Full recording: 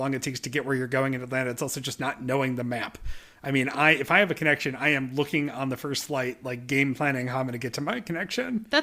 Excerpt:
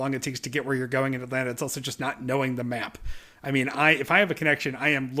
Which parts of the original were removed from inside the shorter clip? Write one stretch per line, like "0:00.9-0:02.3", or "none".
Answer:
none